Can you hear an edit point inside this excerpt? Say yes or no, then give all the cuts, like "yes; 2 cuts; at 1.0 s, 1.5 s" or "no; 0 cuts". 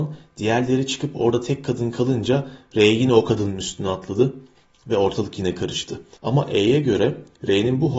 yes; 1 cut; at 6.2 s